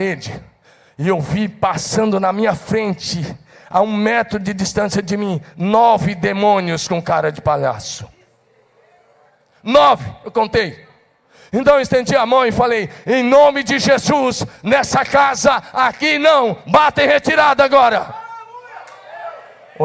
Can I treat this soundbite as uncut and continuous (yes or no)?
yes